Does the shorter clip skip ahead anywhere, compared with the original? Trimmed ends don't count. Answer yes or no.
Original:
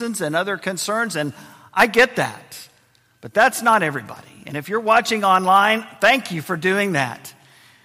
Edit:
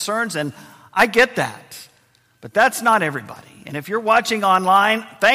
no